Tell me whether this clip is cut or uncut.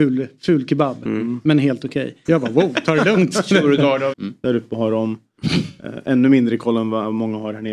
cut